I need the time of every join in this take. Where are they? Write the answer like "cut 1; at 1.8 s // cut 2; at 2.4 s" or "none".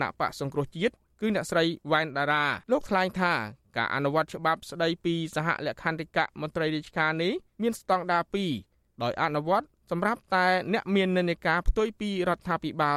cut 1; at 2.6 s